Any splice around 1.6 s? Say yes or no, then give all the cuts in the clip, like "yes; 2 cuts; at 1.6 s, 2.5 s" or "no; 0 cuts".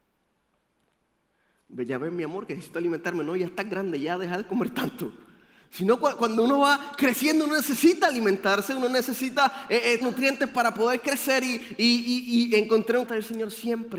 no; 2 cuts; at 10.0 s, 13.1 s